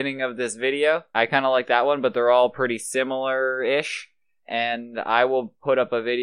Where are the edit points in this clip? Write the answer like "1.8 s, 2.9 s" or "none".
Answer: 1.1 s